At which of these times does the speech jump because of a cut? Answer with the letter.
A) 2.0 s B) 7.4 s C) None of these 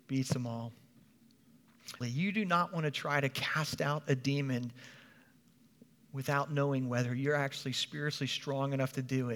A